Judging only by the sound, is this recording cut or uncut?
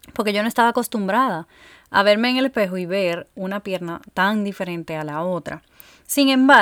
uncut